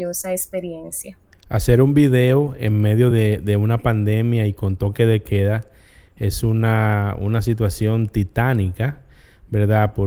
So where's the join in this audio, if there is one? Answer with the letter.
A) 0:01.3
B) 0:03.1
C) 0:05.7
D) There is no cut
D